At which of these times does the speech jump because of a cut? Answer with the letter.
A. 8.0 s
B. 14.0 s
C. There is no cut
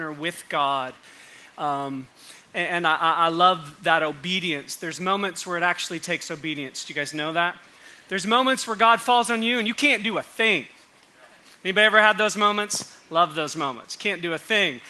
C